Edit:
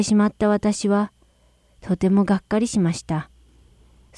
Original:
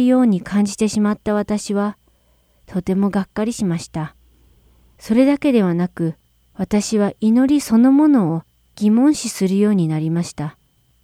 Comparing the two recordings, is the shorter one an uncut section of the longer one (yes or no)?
yes